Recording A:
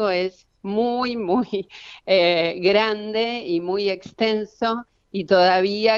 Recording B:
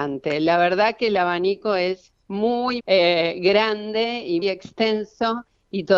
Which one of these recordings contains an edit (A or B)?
B